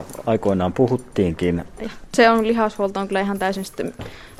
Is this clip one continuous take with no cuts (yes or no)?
no